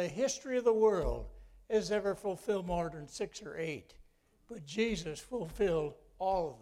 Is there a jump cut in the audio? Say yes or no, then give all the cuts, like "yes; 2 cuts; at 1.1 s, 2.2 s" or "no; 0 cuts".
no; 0 cuts